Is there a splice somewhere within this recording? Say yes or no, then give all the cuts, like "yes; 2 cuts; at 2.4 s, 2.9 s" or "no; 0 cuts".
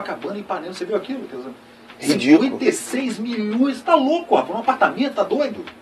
no; 0 cuts